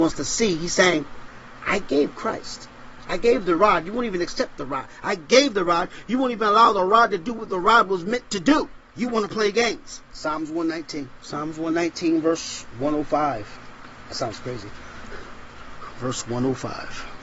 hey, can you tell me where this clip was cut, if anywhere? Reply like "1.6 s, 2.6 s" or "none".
none